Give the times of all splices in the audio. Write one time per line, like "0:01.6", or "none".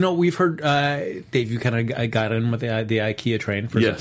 none